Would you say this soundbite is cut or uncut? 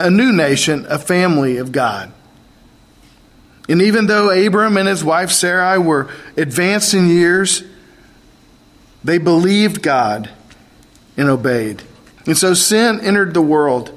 cut